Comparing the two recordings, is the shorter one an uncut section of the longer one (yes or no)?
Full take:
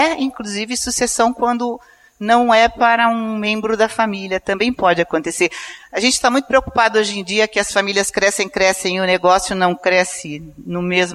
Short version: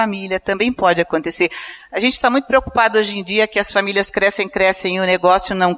yes